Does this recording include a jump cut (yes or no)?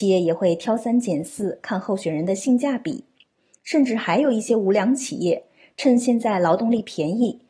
no